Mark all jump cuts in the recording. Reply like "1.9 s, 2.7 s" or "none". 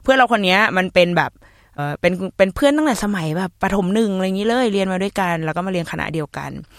1.8 s